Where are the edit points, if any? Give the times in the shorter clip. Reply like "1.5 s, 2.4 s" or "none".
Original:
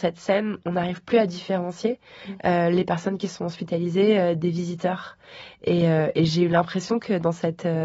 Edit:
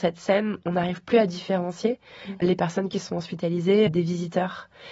2.4 s, 3.9 s